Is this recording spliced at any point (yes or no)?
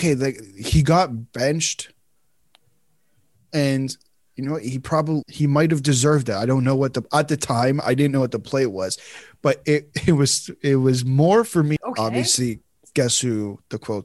yes